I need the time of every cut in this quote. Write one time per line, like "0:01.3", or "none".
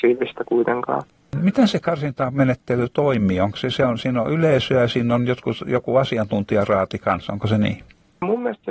0:01.2

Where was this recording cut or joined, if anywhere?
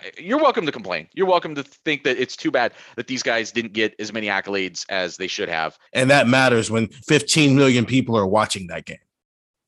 0:05.9
0:07.0

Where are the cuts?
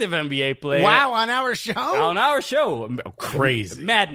none

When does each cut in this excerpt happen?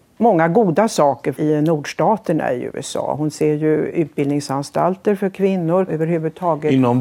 0:01.3
0:05.9

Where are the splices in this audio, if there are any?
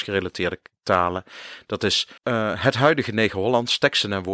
0:02.2

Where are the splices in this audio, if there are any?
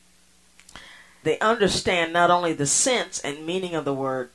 0:01.2

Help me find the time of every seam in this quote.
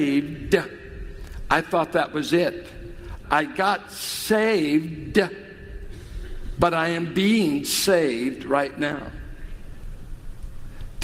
0:03.2

